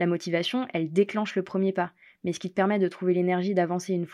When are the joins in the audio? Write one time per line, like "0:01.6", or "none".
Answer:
none